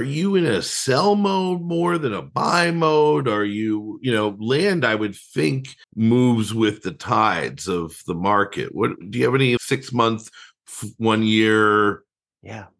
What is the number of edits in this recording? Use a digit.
2